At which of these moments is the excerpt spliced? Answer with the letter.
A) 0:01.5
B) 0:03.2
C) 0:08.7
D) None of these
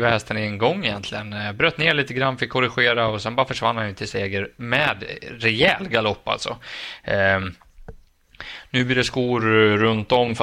D